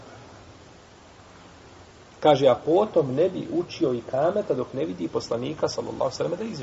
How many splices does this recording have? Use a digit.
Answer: 0